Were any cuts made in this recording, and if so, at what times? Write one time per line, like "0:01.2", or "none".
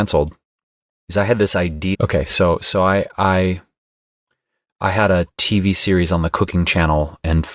0:01.9